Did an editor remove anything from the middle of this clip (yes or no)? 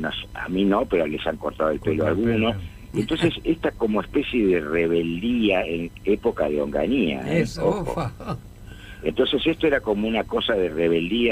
no